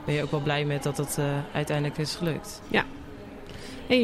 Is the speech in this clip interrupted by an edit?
no; 0 cuts

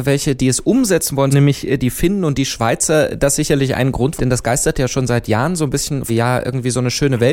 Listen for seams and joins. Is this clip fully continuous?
no; 3 cuts; at 1.3 s, 4.2 s, 6.1 s

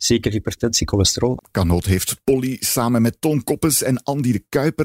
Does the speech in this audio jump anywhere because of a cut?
yes; 1 cut; at 1.4 s

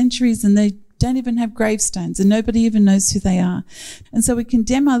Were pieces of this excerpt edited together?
yes; 1 cut; at 4.0 s

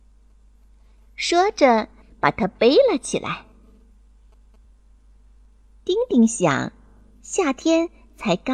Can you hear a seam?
yes; 2 cuts; at 2.0 s, 4.6 s

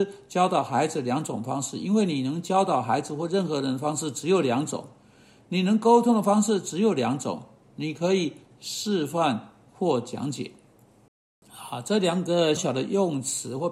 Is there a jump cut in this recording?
yes; 1 cut; at 12.6 s

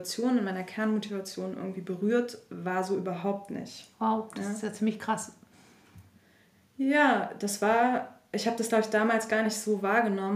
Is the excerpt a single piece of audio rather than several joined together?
yes; 0 cuts

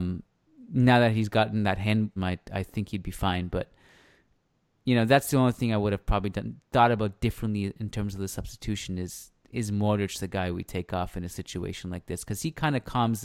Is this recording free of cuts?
no; 1 cut; at 2.2 s

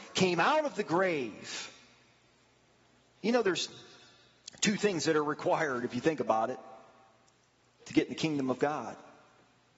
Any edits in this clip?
yes; 1 cut; at 3.2 s

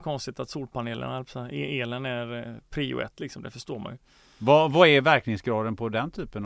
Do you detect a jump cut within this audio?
no; 0 cuts

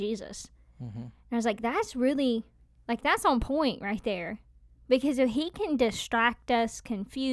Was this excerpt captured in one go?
yes; 0 cuts

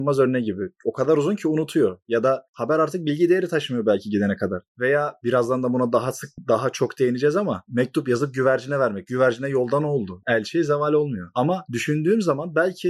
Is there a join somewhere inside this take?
no; 0 cuts

